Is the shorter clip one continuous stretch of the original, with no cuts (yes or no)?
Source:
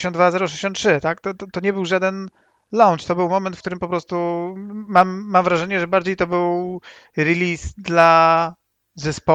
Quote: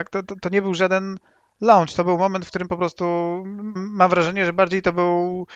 no